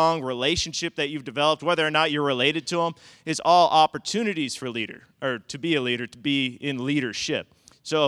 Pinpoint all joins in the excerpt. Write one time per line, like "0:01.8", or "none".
none